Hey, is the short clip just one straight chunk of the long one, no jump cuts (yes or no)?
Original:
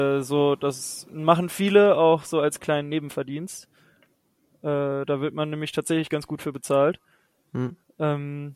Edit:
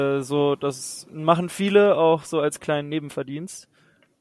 yes